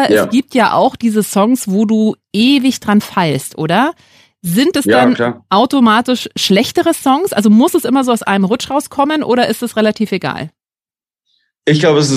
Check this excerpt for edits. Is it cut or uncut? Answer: uncut